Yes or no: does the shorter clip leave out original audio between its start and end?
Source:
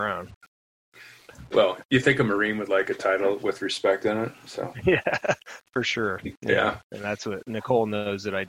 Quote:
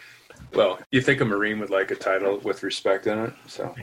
no